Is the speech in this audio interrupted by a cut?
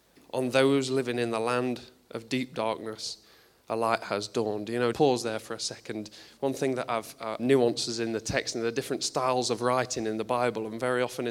yes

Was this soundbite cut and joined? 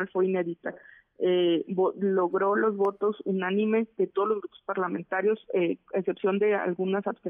no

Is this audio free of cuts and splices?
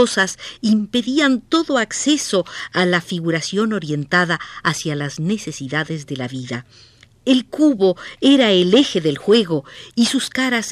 yes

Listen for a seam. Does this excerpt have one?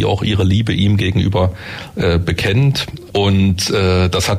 yes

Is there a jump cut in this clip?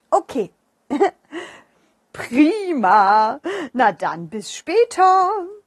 no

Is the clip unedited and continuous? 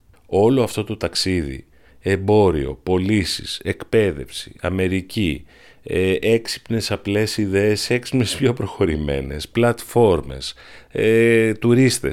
yes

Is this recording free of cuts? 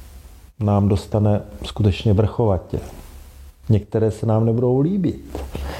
yes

